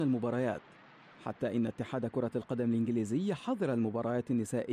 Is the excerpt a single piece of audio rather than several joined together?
yes; 0 cuts

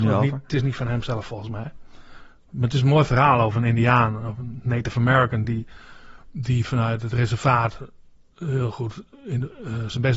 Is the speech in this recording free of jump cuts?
yes; 0 cuts

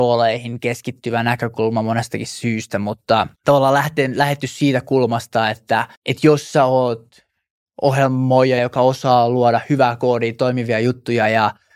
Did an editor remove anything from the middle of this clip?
yes; 3 cuts; at 3.3 s, 5.9 s, 8.6 s

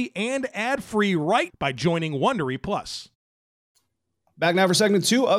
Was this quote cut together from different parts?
yes; 1 cut; at 1.5 s

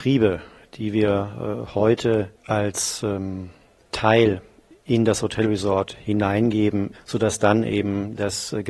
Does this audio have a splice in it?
yes; 1 cut; at 6.9 s

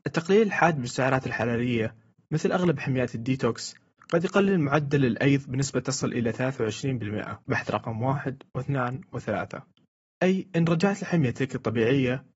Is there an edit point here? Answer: yes; 1 cut; at 7.4 s

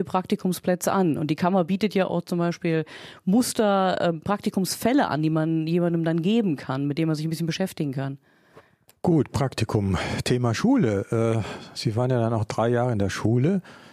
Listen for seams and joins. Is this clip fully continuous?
yes; 0 cuts

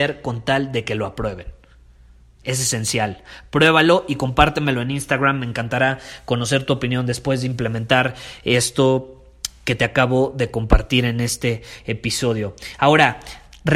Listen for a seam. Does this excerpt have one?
no; 0 cuts

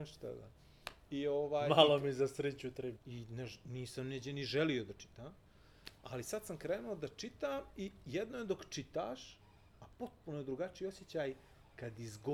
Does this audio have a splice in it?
yes; 1 cut; at 3.0 s

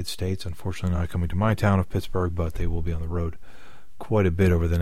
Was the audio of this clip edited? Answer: no; 0 cuts

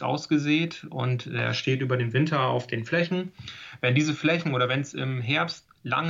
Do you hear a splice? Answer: no; 0 cuts

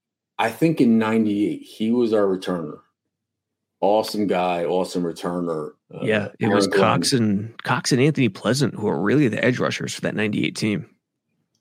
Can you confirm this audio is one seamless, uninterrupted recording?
no; 1 cut; at 5.8 s

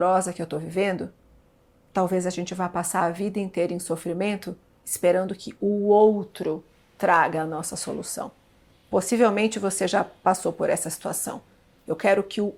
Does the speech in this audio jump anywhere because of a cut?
no; 0 cuts

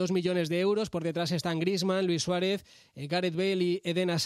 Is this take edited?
no; 0 cuts

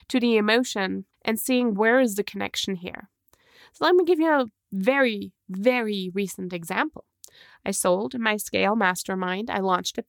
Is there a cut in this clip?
yes; 1 cut; at 1.1 s

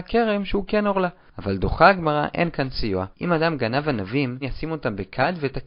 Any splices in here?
yes; 2 cuts; at 3.1 s, 4.4 s

